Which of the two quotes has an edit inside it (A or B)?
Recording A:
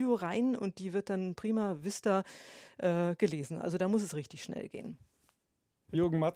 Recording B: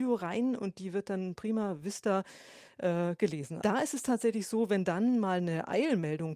B